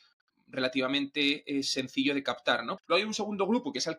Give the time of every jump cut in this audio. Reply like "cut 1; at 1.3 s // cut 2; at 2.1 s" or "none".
cut 1; at 2.8 s

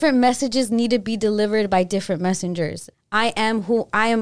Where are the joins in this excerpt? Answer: cut 1; at 2.9 s

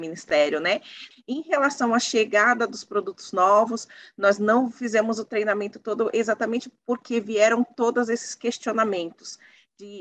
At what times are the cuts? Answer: cut 1; at 1.1 s

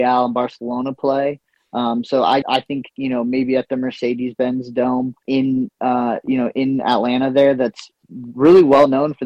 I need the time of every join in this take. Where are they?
cut 1; at 2.4 s // cut 2; at 5.2 s

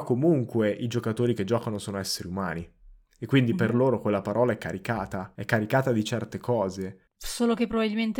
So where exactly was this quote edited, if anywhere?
none

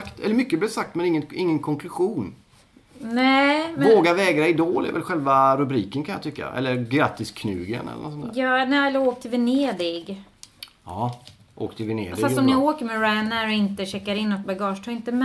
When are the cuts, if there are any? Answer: none

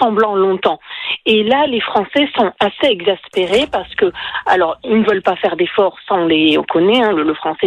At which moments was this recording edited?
none

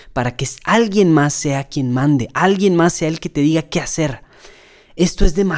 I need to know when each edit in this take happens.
none

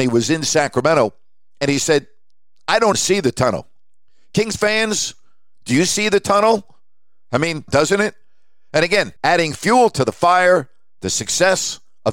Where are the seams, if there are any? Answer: cut 1; at 2.9 s // cut 2; at 7.7 s // cut 3; at 9.2 s

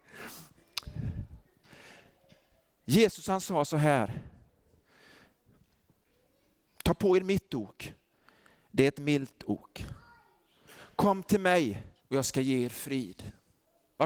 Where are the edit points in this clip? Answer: cut 1; at 12.0 s

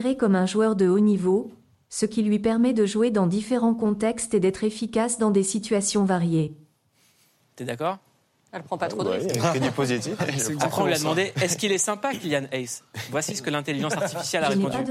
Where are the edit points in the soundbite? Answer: cut 1; at 10.2 s

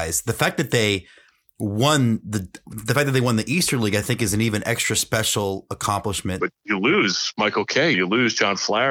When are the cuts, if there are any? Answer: cut 1; at 6.4 s // cut 2; at 7.9 s

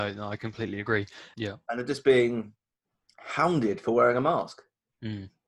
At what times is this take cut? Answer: cut 1; at 1.3 s

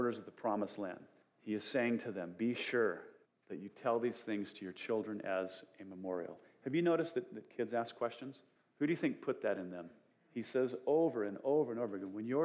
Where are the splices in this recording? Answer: none

